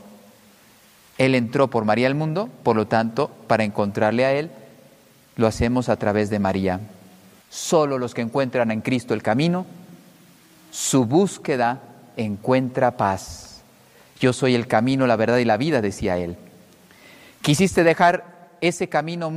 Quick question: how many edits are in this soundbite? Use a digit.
1